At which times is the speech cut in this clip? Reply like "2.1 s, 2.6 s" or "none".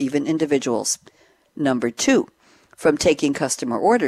none